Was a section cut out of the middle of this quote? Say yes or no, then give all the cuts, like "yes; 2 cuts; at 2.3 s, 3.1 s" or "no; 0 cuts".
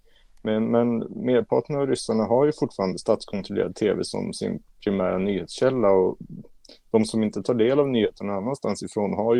no; 0 cuts